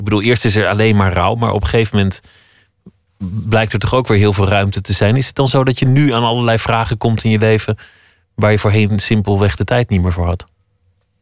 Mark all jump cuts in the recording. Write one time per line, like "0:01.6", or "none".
none